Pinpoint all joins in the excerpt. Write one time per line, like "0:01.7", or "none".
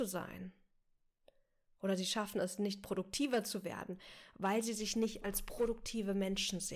none